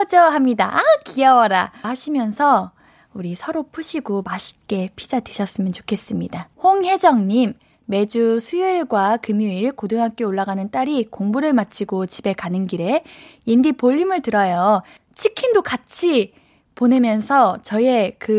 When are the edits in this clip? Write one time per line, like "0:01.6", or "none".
0:01.8
0:06.5
0:15.0